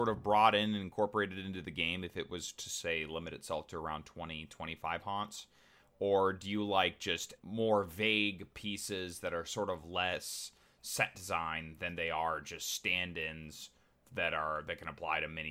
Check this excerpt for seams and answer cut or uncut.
cut